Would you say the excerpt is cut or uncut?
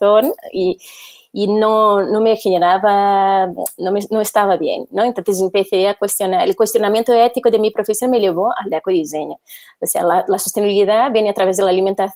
uncut